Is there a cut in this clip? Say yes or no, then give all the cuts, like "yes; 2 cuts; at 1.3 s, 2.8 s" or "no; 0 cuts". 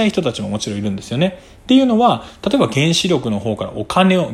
no; 0 cuts